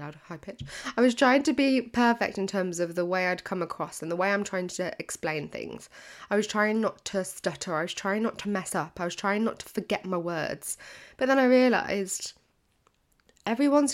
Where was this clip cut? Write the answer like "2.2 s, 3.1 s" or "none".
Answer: none